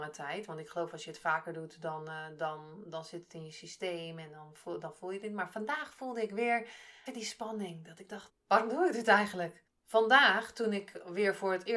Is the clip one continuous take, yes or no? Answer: no